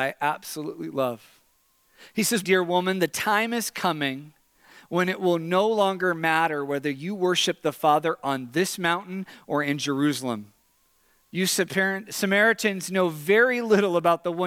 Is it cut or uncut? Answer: cut